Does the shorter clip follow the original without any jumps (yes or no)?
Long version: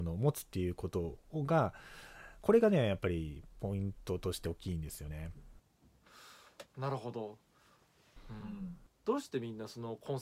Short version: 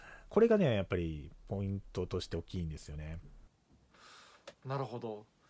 yes